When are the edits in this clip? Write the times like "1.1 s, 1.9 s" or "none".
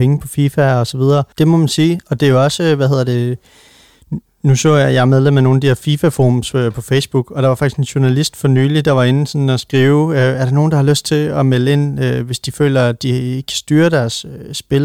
1.3 s